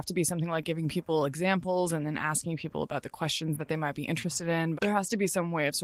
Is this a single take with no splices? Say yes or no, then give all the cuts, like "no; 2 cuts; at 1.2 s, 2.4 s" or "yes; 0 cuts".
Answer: no; 1 cut; at 4.7 s